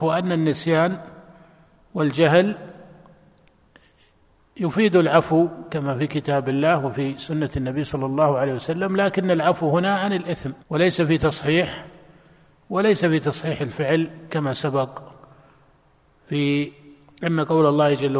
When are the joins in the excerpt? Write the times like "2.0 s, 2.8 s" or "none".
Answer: 10.6 s